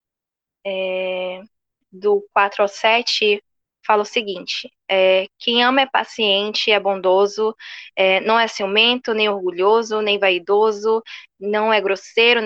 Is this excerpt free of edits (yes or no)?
yes